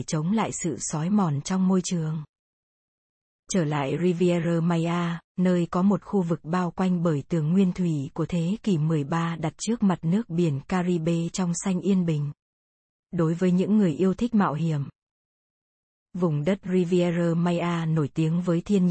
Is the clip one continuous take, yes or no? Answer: no